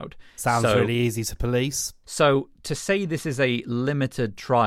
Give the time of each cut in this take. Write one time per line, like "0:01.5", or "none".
0:02.0